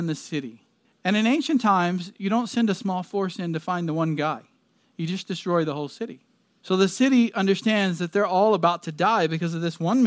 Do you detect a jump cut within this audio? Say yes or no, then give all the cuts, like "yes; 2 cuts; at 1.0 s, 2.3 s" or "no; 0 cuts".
no; 0 cuts